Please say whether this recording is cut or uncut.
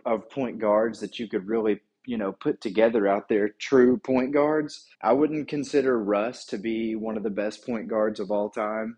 cut